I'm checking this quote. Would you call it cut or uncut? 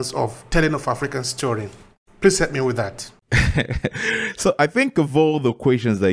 uncut